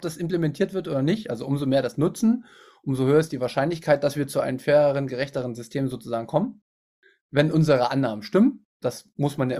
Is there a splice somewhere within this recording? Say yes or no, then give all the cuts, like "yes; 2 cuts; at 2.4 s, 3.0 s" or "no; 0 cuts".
no; 0 cuts